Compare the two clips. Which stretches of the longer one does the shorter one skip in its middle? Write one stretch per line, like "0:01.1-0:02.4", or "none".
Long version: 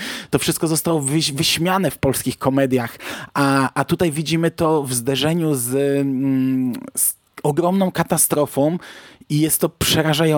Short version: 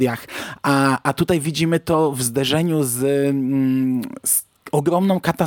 none